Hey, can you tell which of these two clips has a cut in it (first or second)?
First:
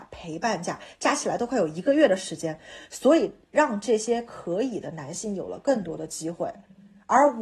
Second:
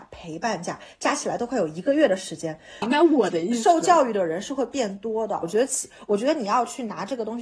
second